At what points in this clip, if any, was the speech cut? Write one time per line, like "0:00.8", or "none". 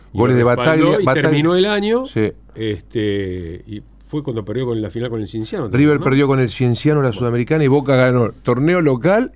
none